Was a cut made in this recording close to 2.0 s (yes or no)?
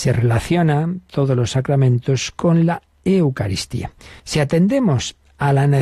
no